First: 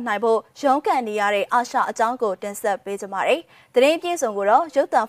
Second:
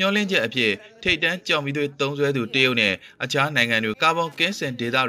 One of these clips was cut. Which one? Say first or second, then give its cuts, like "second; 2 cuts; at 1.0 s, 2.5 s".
second; 1 cut; at 3.9 s